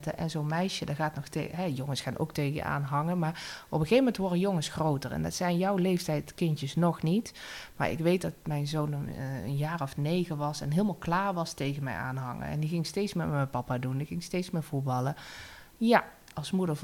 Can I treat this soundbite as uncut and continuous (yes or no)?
yes